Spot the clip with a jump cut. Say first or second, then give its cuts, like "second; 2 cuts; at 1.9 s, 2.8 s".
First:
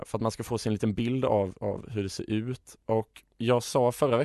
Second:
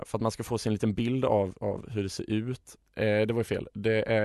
second; 1 cut; at 2.8 s